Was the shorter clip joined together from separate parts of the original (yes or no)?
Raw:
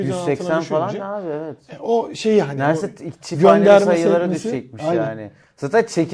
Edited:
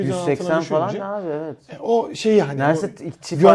no